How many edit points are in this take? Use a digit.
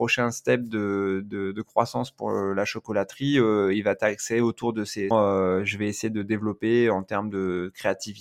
1